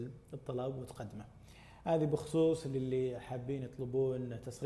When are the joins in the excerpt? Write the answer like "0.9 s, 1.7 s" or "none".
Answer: none